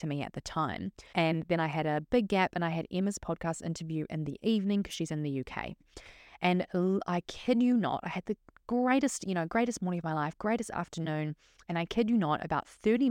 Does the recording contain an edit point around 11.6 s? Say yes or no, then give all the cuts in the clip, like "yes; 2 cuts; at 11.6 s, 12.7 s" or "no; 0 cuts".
no; 1 cut; at 1.1 s